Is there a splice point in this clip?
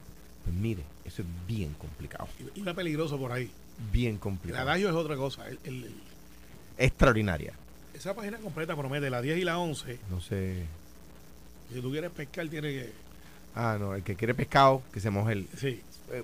yes; 2 cuts; at 6.7 s, 10.0 s

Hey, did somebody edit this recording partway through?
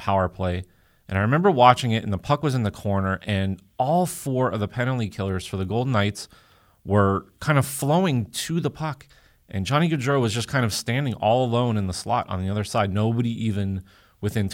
no; 0 cuts

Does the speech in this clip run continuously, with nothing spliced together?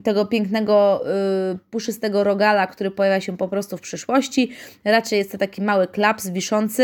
yes; 0 cuts

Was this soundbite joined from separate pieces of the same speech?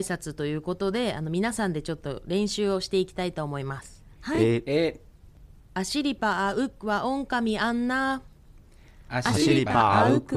no; 0 cuts

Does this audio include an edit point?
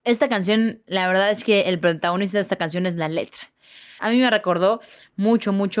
yes; 1 cut; at 4.0 s

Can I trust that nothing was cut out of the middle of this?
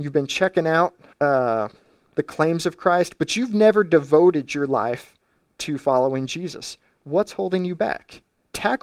yes; 0 cuts

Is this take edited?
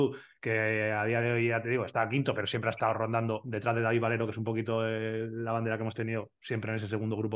no; 0 cuts

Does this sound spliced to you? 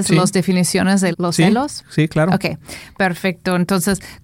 yes; 1 cut; at 1.1 s

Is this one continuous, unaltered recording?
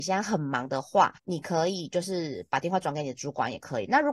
no; 1 cut; at 1.2 s

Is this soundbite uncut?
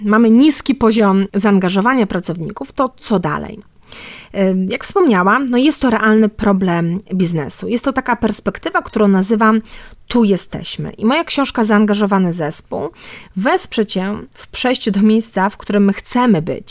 yes; 0 cuts

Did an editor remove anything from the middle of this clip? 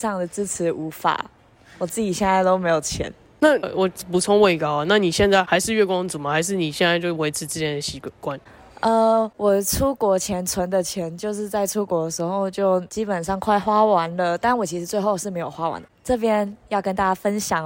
no; 0 cuts

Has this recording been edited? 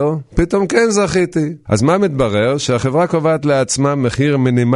yes; 1 cut; at 1.7 s

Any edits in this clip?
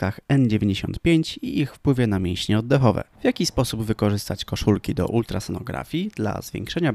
yes; 1 cut; at 3.1 s

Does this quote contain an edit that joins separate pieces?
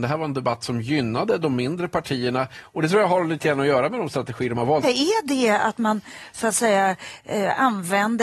yes; 1 cut; at 4.8 s

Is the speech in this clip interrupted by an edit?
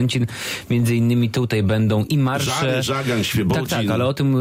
no; 0 cuts

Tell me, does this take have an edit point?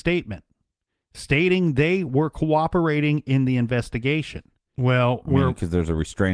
yes; 1 cut; at 4.7 s

